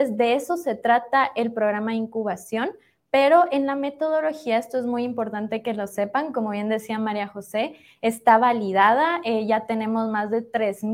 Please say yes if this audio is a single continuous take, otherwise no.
yes